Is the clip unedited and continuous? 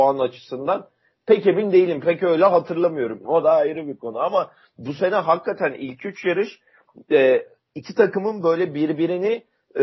no; 1 cut; at 3.2 s

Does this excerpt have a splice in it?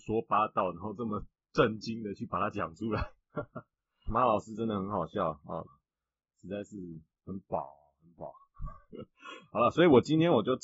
yes; 2 cuts; at 4.1 s, 5.6 s

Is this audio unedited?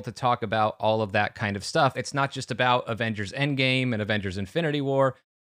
no; 1 cut; at 1.9 s

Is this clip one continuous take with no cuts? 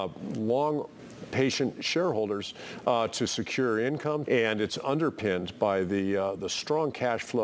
no; 1 cut; at 4.2 s

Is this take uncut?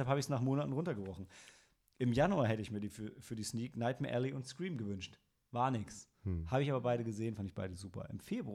yes; 0 cuts

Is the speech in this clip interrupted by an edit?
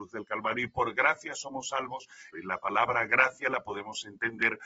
yes; 1 cut; at 2.3 s

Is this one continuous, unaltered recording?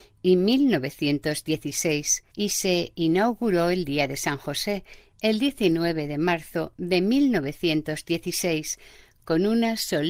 no; 1 cut; at 2.3 s

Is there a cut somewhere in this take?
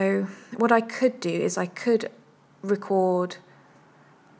no; 0 cuts

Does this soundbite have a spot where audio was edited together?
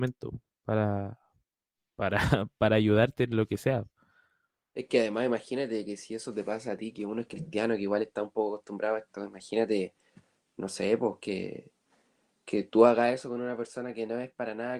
no; 0 cuts

